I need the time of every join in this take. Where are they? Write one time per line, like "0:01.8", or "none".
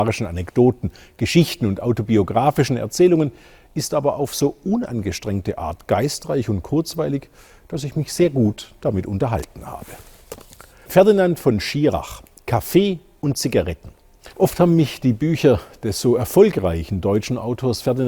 0:10.9
0:14.3